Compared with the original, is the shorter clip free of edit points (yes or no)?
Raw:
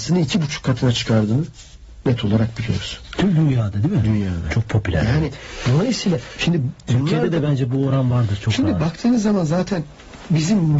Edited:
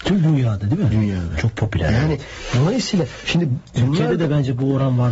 yes